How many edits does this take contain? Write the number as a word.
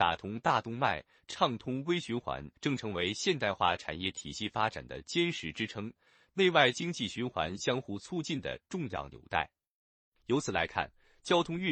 one